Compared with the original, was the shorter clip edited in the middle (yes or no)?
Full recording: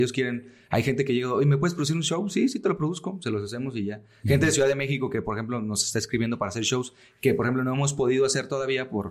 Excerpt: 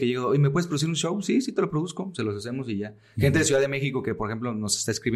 no